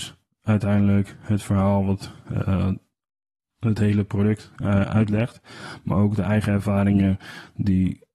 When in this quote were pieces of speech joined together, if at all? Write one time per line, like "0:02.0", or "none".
none